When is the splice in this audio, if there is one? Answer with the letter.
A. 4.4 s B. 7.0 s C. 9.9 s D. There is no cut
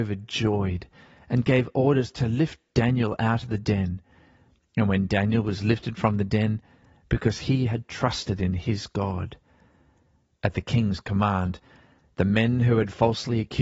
B